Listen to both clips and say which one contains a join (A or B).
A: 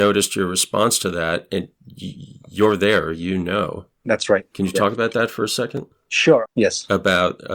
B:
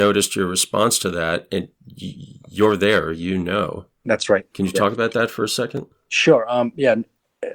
A